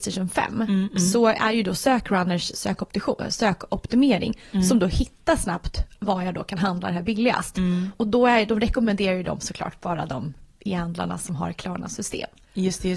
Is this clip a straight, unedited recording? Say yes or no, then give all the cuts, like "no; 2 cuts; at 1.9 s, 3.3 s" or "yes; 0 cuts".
yes; 0 cuts